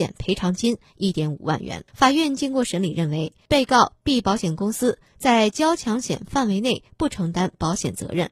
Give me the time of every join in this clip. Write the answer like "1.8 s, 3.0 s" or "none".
1.9 s, 3.5 s